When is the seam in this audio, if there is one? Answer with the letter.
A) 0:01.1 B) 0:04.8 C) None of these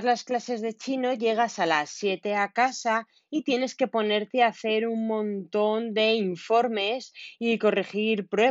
C